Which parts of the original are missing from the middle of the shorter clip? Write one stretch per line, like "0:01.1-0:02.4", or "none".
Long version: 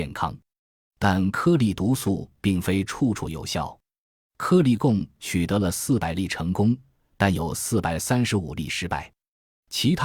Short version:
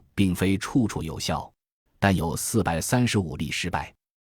0:04.1-0:07.0